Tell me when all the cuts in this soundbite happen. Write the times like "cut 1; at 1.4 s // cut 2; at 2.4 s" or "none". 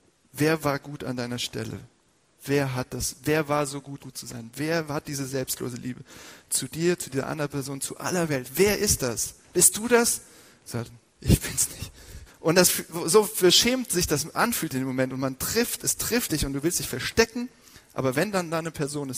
cut 1; at 4.0 s // cut 2; at 11.1 s // cut 3; at 12.3 s